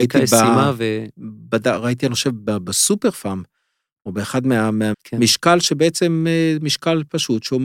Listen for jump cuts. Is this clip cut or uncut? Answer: cut